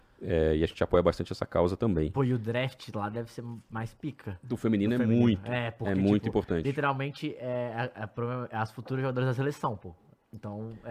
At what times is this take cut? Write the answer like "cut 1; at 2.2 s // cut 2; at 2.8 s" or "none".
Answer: none